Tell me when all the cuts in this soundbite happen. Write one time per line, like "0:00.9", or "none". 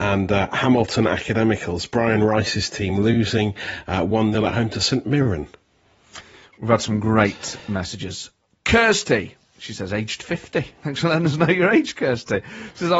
0:06.5